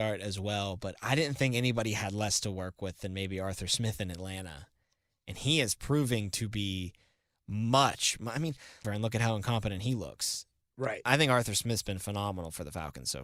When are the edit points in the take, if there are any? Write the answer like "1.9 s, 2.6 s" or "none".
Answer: 8.8 s

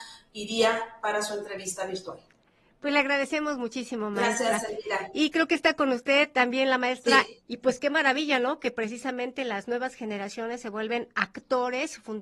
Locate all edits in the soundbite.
7.5 s

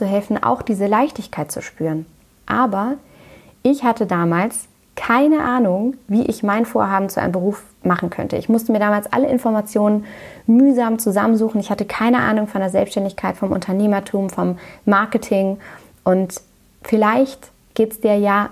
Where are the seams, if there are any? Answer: none

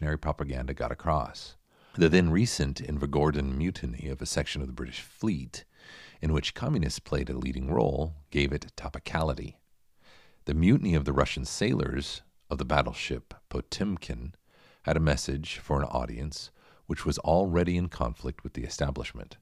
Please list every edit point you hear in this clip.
none

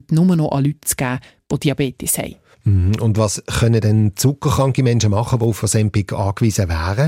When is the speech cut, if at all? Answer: none

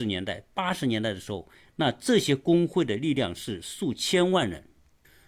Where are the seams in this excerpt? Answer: none

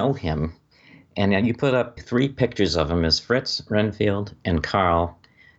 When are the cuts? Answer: 2.0 s

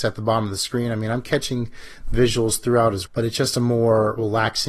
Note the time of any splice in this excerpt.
3.1 s

